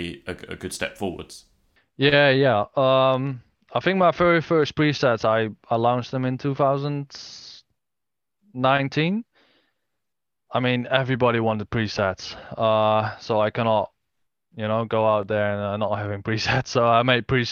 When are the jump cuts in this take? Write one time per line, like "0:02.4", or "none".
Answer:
none

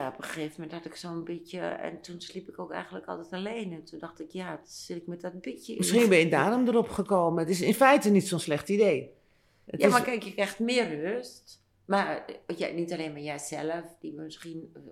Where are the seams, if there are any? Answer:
none

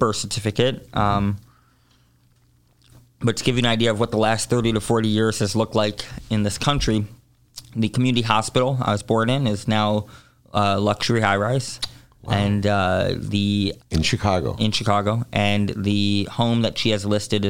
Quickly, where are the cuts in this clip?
0:13.8

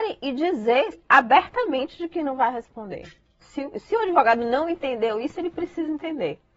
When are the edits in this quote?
0:00.9
0:03.4

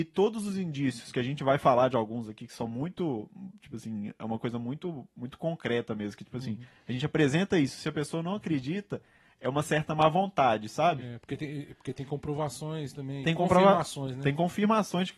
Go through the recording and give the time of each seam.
none

